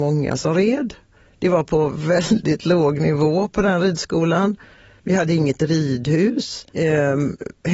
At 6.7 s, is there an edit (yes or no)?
yes